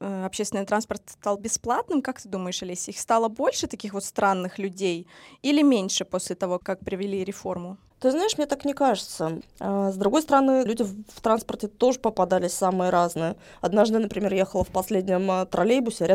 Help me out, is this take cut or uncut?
cut